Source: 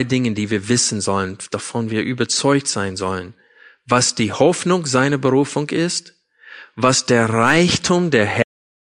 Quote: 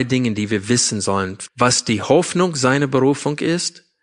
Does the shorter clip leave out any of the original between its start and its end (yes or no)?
yes